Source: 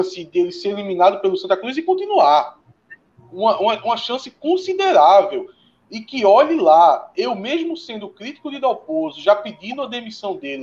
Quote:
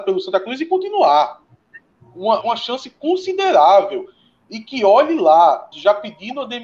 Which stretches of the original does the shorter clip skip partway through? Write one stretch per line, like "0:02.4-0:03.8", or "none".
0:03.6-0:03.8
0:07.1-0:09.1